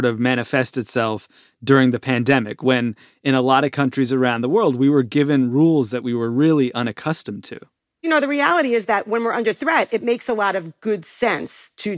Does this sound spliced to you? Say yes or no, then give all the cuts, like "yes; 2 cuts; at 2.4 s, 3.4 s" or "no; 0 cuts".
no; 0 cuts